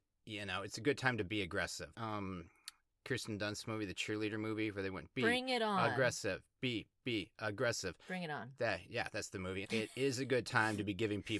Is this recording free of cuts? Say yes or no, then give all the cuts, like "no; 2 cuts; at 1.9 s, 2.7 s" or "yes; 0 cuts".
no; 2 cuts; at 1.9 s, 9.6 s